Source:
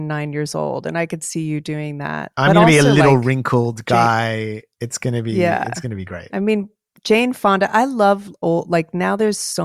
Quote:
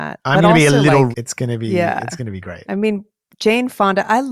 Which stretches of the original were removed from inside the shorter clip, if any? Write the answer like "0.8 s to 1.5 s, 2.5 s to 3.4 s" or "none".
3.2 s to 4.7 s